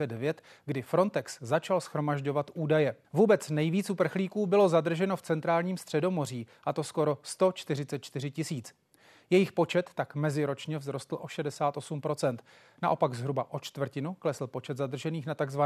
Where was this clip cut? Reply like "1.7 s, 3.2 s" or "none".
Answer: 3.0 s